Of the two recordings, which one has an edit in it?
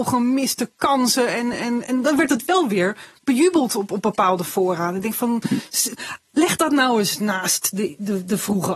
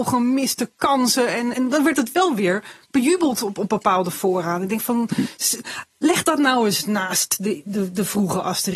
second; 1 cut; at 1.5 s

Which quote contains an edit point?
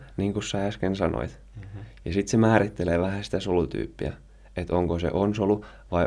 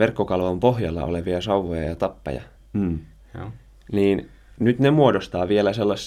second; 1 cut; at 2.6 s

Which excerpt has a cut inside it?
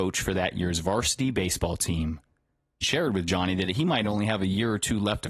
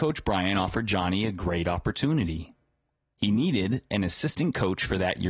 first; 1 cut; at 2.8 s

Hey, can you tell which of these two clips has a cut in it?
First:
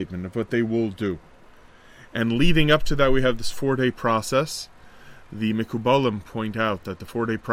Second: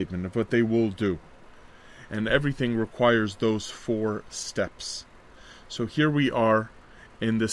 second; 1 cut; at 2.1 s

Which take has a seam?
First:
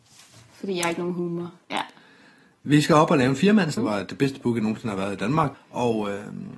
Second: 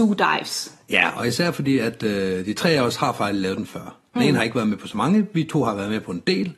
first; 3 cuts; at 1.6 s, 3.8 s, 5.5 s

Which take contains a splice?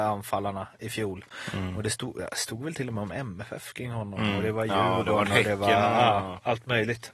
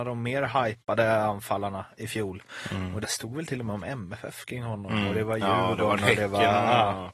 second; 1 cut; at 3.0 s

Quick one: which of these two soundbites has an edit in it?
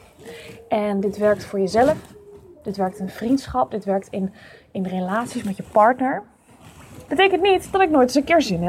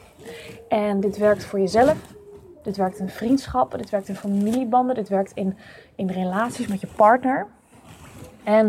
first; 2 cuts; at 3.7 s, 7.1 s

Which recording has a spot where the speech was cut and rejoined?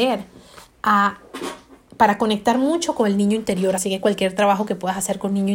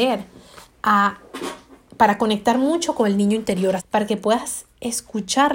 second; 1 cut; at 3.8 s

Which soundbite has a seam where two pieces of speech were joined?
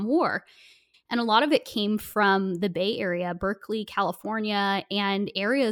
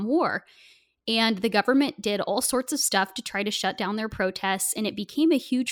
first; 1 cut; at 0.9 s

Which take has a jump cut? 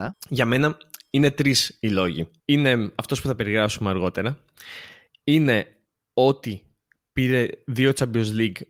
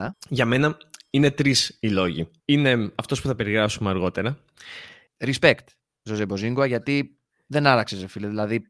second; 1 cut; at 5.1 s

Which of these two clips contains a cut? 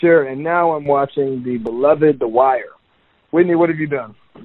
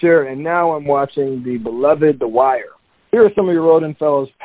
second; 1 cut; at 3.1 s

